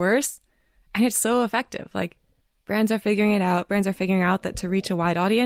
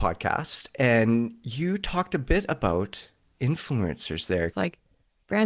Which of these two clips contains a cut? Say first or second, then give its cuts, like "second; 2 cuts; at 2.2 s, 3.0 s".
second; 1 cut; at 4.5 s